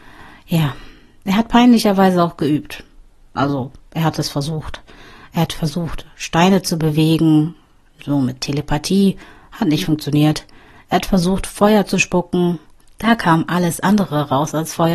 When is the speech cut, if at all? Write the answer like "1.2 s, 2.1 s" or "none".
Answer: none